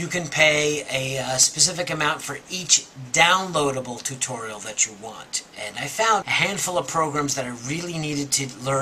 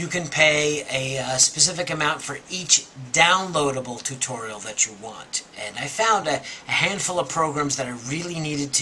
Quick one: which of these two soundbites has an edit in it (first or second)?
first